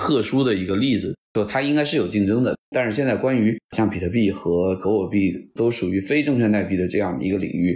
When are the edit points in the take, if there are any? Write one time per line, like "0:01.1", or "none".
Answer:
0:01.4
0:02.7